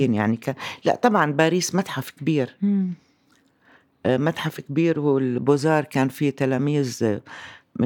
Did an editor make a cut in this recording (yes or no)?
no